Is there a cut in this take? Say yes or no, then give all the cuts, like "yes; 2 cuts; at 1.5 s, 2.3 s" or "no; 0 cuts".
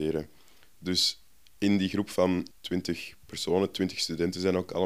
yes; 1 cut; at 2.5 s